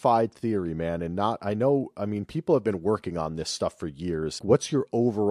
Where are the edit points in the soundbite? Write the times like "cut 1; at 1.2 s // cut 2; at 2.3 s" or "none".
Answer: cut 1; at 4.4 s